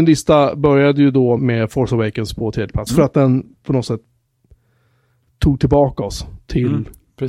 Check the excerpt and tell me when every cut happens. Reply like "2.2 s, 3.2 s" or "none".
1.4 s, 2.9 s